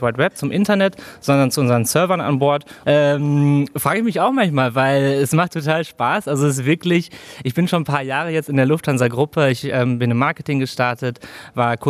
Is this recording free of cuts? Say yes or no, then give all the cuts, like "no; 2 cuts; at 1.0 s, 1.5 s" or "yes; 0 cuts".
no; 1 cut; at 2.8 s